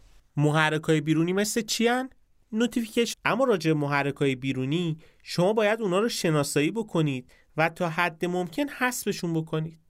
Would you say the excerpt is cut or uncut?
cut